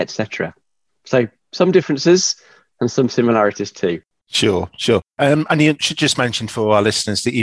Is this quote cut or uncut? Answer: uncut